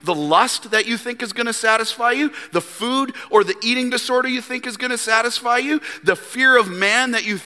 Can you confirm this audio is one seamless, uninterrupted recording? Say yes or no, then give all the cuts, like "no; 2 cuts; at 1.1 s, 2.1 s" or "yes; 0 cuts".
yes; 0 cuts